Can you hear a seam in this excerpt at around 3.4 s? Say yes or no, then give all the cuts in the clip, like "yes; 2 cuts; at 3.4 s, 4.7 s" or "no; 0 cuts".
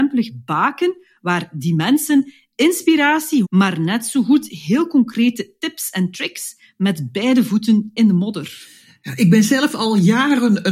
yes; 1 cut; at 3.4 s